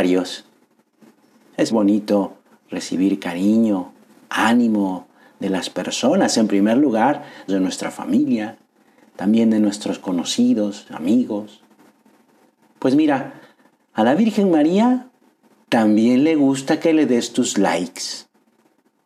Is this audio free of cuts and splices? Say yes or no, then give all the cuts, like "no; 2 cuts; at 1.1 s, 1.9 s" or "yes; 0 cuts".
no; 2 cuts; at 1.7 s, 7.5 s